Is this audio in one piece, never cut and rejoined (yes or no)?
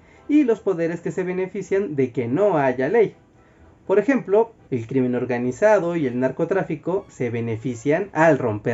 no